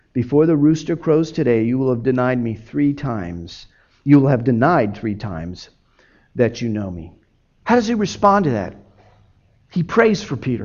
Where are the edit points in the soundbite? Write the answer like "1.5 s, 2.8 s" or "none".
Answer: 7.6 s